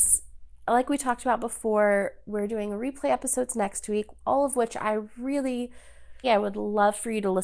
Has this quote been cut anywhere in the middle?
yes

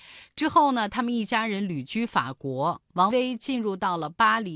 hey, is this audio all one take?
no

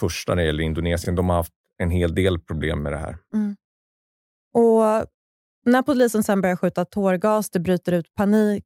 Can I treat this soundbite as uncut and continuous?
yes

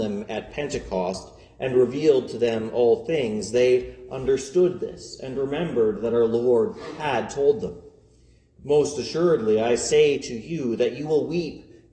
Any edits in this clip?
no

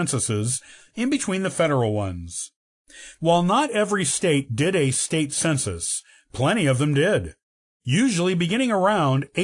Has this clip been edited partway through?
yes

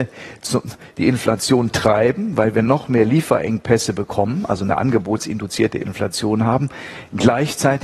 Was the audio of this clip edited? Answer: no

